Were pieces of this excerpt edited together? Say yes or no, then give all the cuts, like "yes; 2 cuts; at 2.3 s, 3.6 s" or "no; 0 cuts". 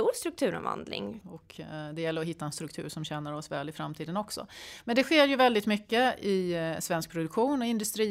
yes; 1 cut; at 1.2 s